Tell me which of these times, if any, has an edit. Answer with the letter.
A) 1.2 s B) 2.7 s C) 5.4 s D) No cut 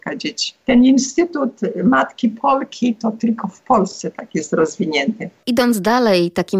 D